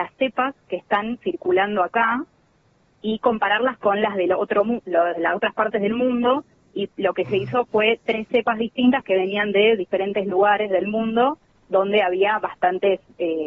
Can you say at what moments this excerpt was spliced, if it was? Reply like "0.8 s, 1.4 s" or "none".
none